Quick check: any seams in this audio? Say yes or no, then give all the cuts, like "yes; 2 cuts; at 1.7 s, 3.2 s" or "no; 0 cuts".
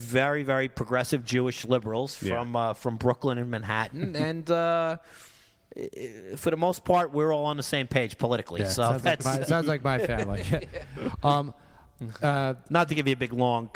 no; 0 cuts